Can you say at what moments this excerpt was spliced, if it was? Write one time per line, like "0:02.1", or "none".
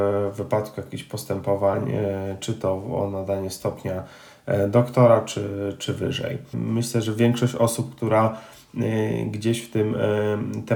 0:06.5